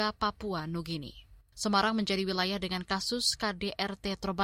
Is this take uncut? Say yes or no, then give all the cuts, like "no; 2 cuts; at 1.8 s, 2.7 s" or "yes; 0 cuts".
no; 1 cut; at 1.5 s